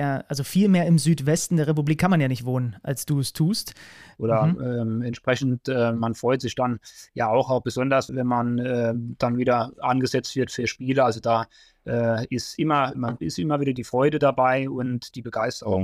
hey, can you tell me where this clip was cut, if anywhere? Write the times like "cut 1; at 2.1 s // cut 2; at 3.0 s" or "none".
cut 1; at 4.2 s // cut 2; at 8.1 s // cut 3; at 12.9 s